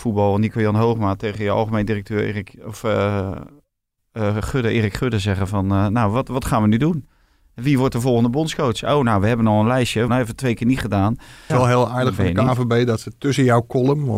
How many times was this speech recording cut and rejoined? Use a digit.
2